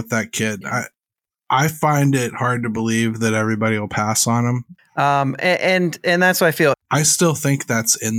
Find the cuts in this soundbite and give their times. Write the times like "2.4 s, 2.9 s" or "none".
4.8 s, 6.7 s